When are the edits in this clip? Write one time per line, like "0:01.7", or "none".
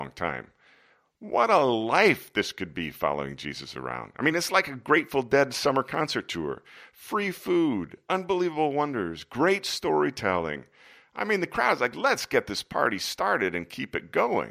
none